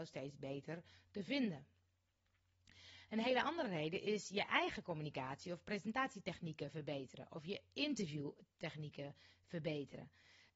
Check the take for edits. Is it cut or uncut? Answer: uncut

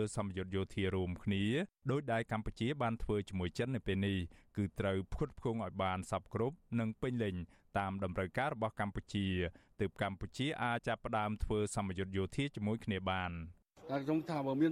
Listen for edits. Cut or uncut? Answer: cut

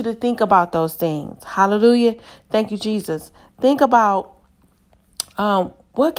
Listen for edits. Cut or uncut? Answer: uncut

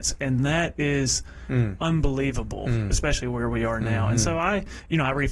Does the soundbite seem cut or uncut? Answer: uncut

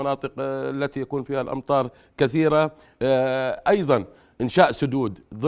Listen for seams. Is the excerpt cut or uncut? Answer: uncut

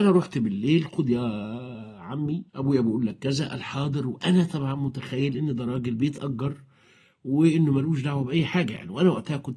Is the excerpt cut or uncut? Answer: cut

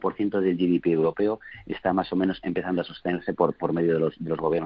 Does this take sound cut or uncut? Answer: uncut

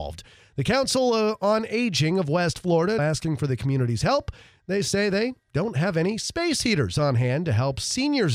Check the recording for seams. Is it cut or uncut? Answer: cut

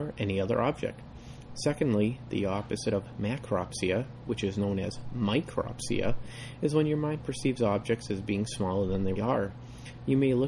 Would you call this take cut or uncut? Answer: cut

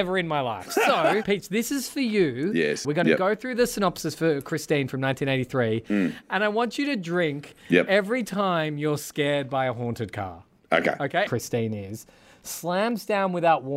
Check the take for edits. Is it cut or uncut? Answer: cut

